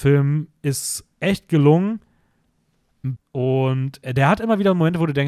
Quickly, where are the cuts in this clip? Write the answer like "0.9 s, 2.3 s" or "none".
3.2 s